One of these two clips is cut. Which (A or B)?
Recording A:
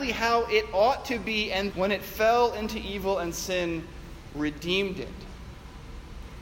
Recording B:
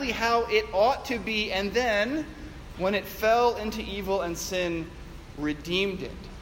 A